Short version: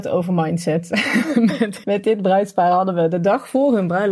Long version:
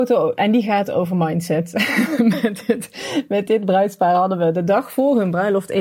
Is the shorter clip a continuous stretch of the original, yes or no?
no